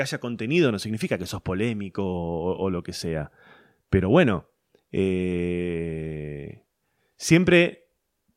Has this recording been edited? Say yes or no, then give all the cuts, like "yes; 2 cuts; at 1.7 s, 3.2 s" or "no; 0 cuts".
no; 0 cuts